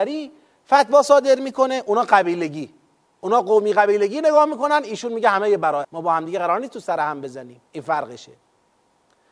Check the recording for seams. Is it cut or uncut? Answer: cut